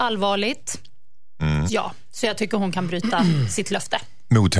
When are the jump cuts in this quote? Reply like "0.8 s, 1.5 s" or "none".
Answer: 1.7 s